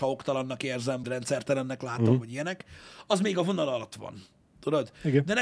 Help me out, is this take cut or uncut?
cut